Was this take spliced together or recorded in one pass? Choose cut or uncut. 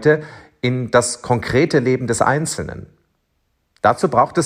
uncut